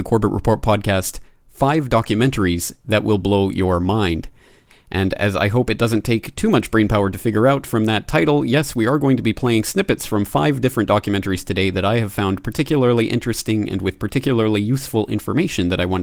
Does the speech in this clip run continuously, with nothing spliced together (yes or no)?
yes